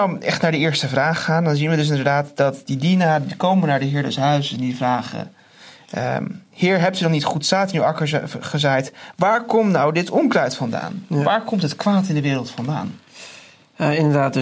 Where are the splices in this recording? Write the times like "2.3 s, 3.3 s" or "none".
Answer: none